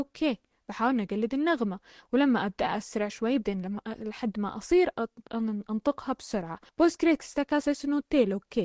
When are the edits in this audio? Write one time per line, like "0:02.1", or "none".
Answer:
0:03.1
0:06.7